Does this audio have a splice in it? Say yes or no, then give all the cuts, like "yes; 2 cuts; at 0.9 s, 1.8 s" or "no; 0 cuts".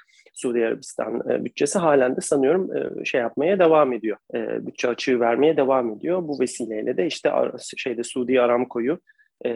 yes; 1 cut; at 4.2 s